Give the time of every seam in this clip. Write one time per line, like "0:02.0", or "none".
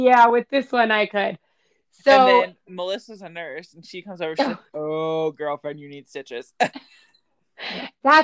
none